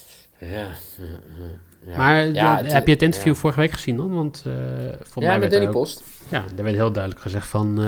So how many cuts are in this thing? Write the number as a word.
zero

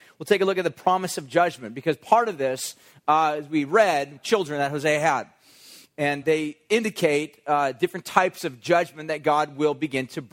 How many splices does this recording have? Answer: two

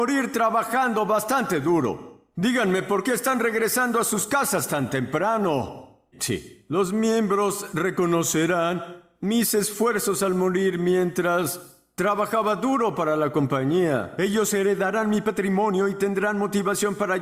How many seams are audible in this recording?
two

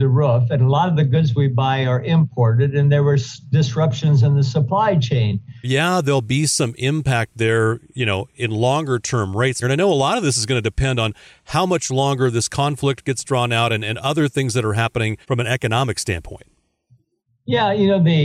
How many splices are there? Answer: three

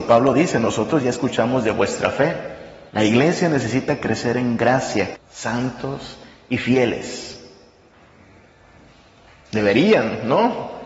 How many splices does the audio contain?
two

